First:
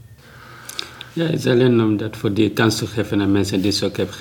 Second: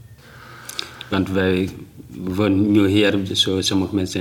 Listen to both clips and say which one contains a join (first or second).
second